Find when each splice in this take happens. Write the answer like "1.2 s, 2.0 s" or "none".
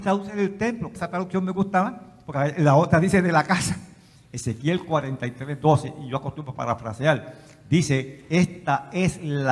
1.0 s, 4.2 s